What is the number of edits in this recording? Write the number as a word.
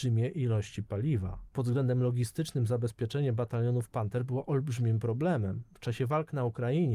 zero